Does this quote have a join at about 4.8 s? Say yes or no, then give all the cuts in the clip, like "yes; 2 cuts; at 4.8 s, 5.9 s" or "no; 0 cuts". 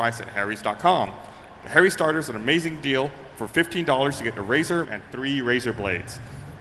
yes; 1 cut; at 4.8 s